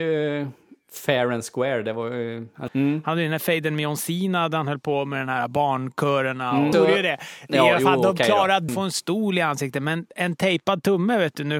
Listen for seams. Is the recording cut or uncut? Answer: cut